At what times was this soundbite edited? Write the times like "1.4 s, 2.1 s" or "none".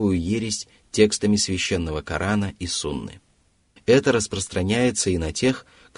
3.8 s

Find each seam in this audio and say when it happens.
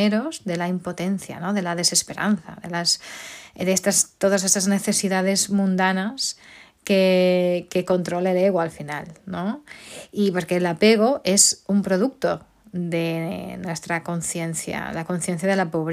none

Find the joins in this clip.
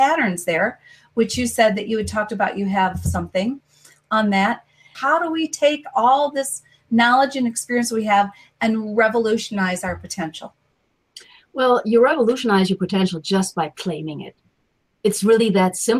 4.9 s

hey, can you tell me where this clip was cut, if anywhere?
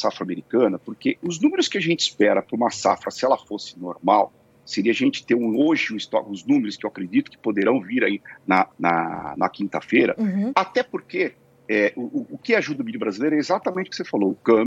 8.7 s, 10.5 s

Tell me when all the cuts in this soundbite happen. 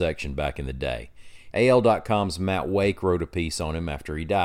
1.5 s

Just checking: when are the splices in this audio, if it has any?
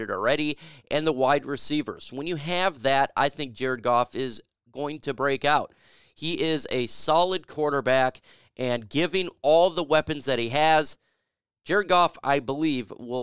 none

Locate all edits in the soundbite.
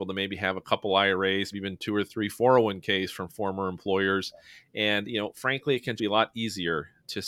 1.5 s, 6.0 s

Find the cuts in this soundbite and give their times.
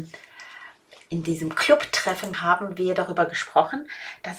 2.3 s

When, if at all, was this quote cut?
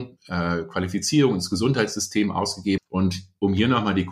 2.8 s

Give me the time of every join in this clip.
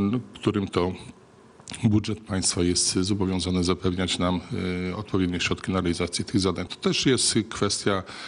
6.7 s

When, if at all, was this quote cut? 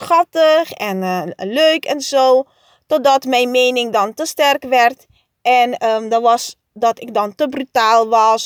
none

